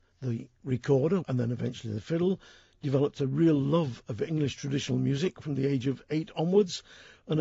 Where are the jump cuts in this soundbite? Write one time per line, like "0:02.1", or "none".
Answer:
0:01.2

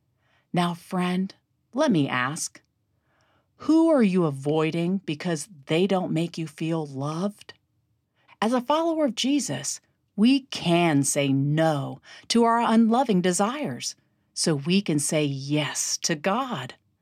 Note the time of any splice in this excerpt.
0:08.3

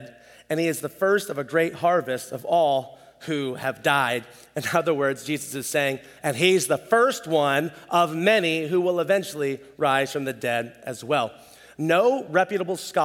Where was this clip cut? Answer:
0:06.2
0:11.8

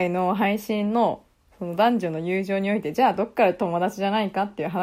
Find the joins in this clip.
none

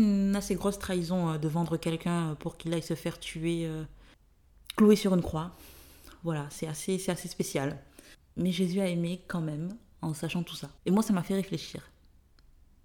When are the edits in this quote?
0:10.8

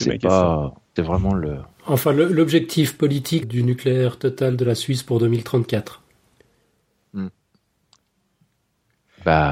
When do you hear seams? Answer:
0:01.0
0:03.4

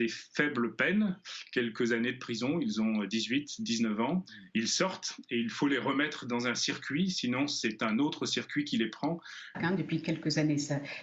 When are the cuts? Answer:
0:09.5

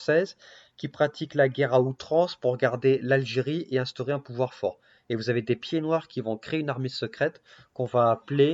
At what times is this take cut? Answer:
none

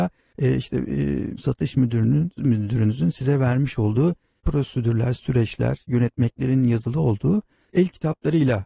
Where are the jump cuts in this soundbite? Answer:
0:01.4

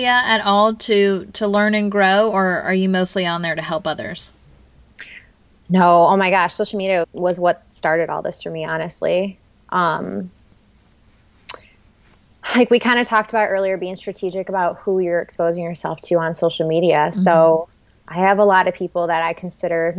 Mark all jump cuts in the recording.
0:07.0

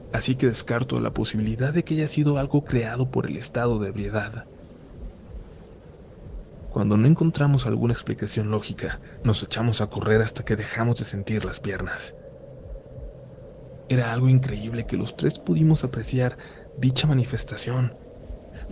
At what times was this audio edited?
0:13.9

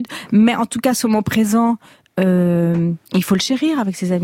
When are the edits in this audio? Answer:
0:03.0

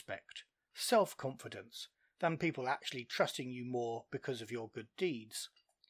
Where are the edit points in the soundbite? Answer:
none

